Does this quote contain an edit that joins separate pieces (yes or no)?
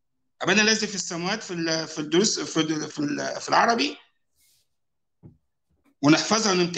no